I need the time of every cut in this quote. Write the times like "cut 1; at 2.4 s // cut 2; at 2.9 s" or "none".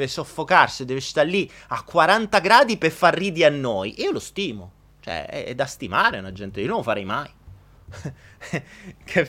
cut 1; at 7.8 s